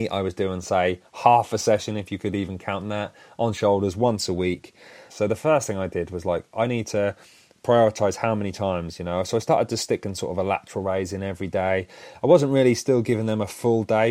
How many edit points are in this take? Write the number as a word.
one